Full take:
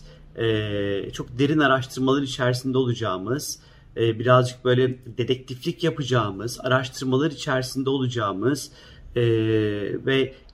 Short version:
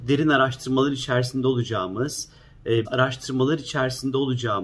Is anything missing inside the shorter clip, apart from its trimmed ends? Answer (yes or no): yes